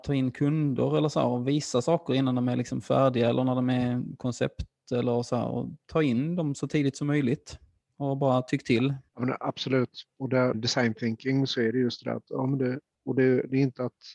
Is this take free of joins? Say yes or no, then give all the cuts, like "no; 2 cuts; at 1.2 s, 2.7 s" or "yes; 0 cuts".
no; 2 cuts; at 9.1 s, 10.5 s